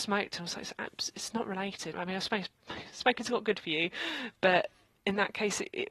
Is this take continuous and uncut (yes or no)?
no